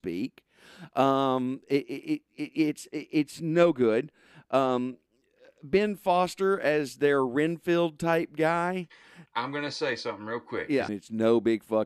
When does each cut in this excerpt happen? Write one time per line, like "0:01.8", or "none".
0:09.3
0:10.9